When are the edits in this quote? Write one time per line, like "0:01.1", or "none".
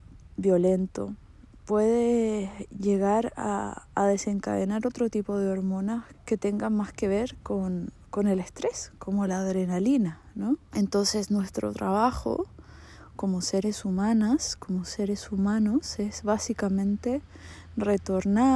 0:06.1
0:10.7